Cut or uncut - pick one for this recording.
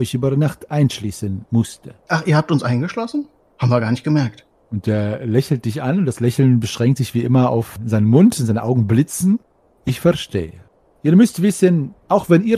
uncut